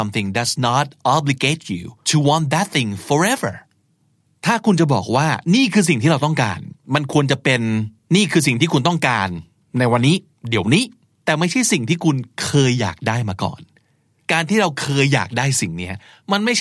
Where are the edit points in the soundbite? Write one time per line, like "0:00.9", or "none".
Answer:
none